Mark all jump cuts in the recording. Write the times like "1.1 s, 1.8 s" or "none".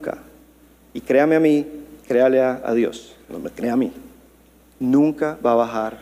none

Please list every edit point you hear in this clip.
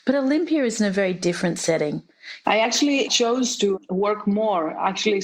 2.4 s

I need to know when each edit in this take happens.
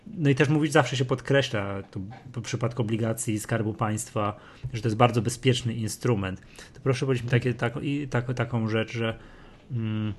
none

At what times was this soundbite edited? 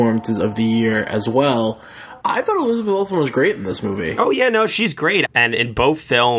2.2 s, 5.3 s

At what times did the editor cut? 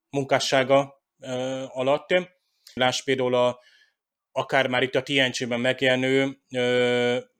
2.8 s

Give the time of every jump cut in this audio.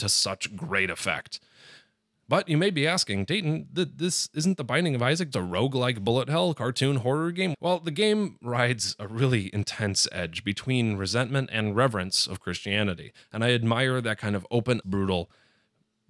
5.3 s, 7.5 s, 14.8 s

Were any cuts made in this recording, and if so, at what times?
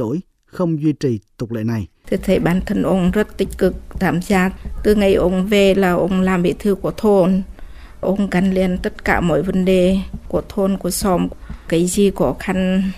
2.0 s

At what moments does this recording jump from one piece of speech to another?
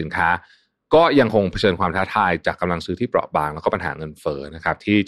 none

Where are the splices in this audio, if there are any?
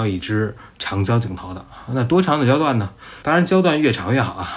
3.2 s

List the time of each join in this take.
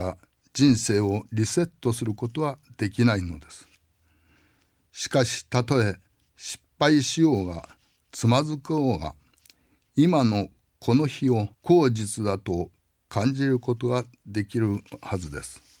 11.5 s

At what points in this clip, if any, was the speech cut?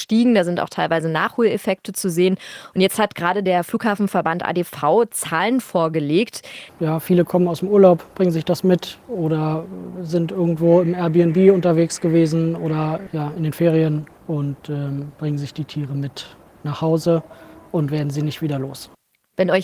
6.7 s

